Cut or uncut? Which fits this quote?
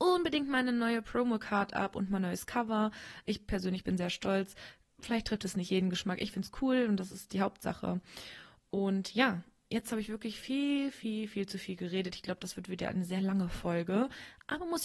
uncut